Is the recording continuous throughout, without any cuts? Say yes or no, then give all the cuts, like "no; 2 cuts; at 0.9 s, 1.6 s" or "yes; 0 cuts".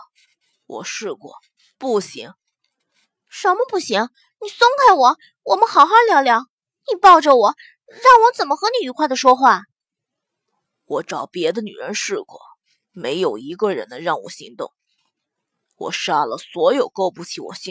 yes; 0 cuts